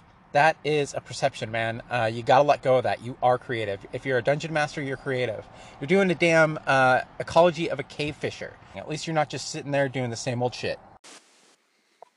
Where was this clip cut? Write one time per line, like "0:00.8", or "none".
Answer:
0:08.7